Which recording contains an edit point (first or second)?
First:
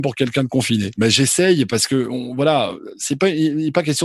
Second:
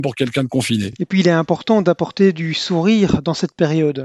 first